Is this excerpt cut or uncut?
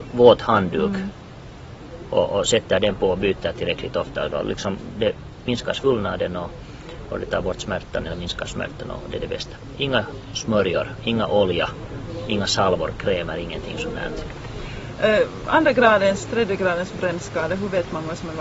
uncut